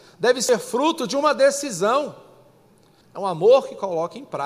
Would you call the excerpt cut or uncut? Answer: cut